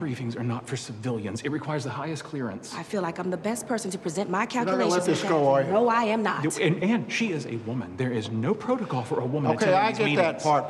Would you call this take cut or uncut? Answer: uncut